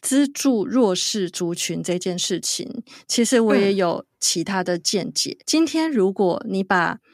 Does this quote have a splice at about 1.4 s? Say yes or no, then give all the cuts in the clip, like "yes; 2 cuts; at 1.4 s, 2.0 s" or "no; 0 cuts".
no; 1 cut; at 5.4 s